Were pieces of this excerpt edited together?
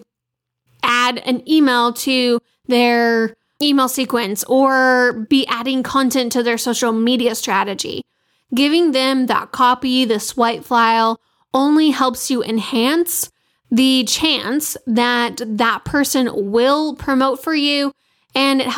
no; 0 cuts

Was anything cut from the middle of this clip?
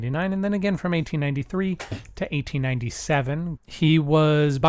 yes; 1 cut; at 3.6 s

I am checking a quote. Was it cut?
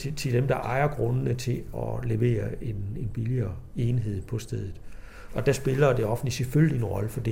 yes; 2 cuts; at 1.7 s, 5.3 s

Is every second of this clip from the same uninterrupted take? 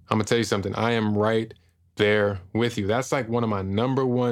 yes; 0 cuts

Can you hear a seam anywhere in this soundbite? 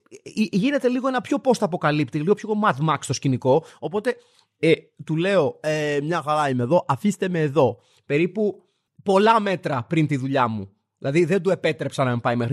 no; 0 cuts

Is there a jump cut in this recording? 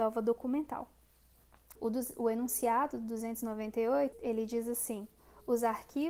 yes; 2 cuts; at 1.8 s, 4.1 s

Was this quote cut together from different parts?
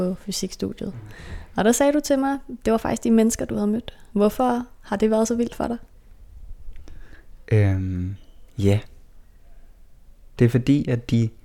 yes; 2 cuts; at 4.1 s, 10.4 s

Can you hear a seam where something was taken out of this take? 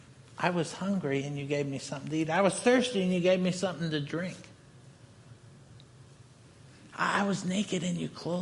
no; 0 cuts

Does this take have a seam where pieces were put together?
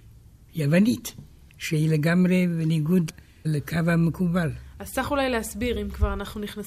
no; 0 cuts

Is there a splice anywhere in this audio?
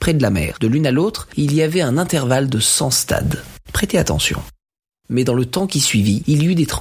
yes; 1 cut; at 3.6 s

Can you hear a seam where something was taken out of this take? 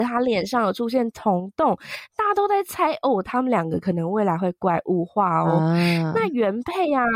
no; 0 cuts

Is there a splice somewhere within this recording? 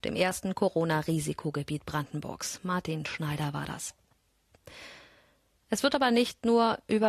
no; 0 cuts

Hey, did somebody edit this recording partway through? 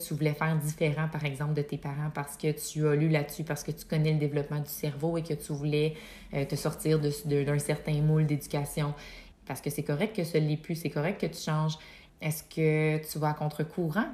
yes; 2 cuts; at 9.3 s, 12.1 s

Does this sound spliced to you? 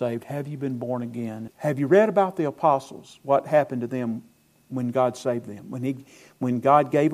yes; 1 cut; at 1.5 s

